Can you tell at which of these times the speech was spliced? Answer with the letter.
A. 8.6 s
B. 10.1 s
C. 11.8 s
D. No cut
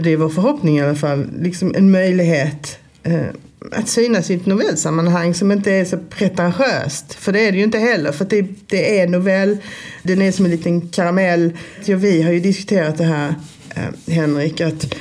B